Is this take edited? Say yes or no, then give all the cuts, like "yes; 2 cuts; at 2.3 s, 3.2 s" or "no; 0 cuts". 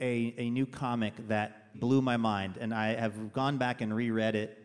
yes; 1 cut; at 1.7 s